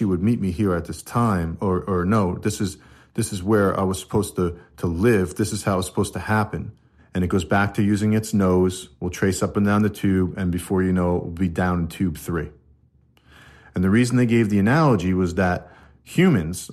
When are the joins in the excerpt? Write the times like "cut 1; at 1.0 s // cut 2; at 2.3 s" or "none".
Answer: cut 1; at 7.0 s